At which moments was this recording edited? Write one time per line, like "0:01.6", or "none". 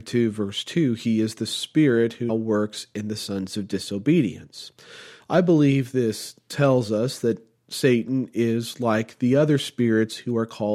0:02.3
0:05.2